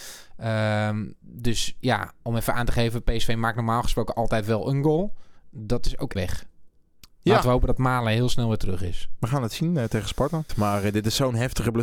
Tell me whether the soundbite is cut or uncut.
cut